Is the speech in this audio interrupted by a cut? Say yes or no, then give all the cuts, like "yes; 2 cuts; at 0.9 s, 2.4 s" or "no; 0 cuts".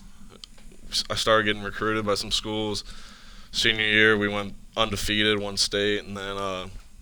no; 0 cuts